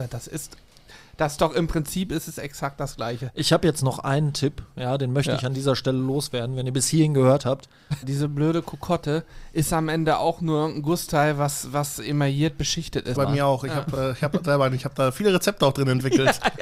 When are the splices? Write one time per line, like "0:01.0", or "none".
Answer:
0:08.0
0:13.1

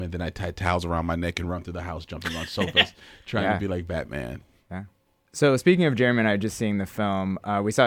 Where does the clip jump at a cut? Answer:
none

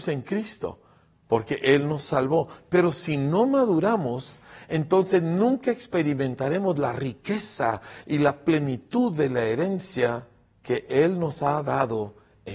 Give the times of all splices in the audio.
none

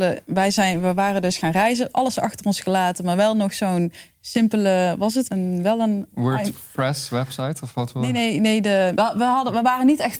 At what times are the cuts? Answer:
0:05.3
0:09.0

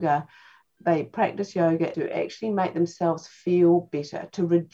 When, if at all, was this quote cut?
0:01.9

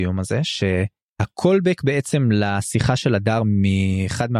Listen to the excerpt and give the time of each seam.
none

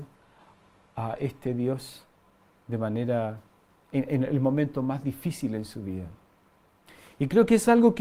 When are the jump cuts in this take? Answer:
none

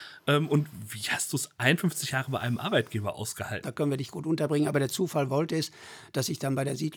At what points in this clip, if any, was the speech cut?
0:03.6

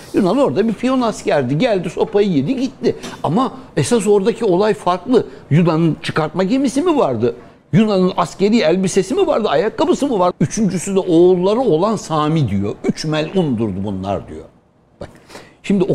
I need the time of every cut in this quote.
0:10.3

